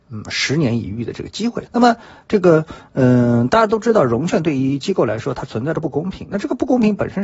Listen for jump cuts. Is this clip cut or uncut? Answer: cut